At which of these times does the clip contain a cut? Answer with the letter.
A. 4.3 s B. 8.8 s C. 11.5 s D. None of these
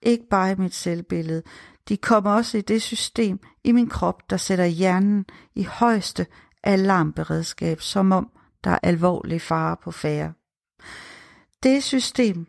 B